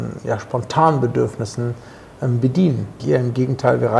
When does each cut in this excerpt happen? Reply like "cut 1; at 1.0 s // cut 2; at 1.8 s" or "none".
cut 1; at 3.0 s